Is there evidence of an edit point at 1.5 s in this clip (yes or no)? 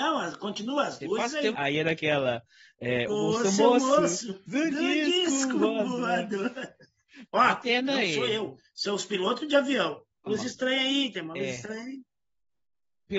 yes